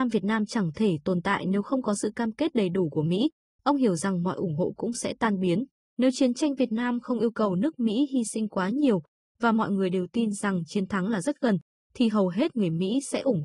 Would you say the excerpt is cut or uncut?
cut